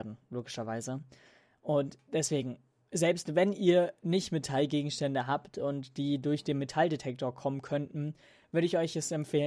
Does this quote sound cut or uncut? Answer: uncut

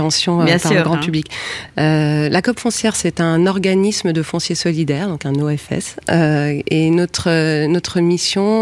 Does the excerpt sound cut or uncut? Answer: uncut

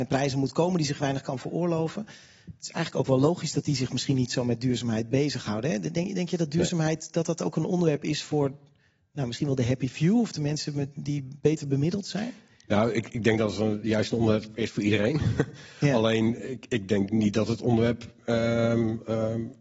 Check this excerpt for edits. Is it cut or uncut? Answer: uncut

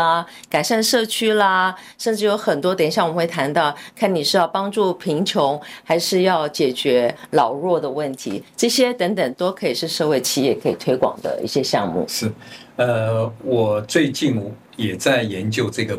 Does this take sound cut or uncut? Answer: uncut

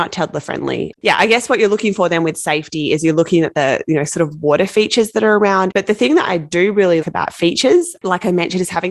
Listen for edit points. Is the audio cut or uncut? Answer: cut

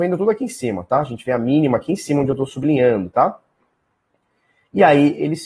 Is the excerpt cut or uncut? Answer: uncut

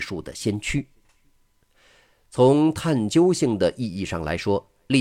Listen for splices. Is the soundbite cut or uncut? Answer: uncut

